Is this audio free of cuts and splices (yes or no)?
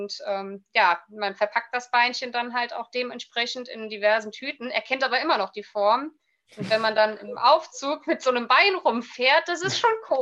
yes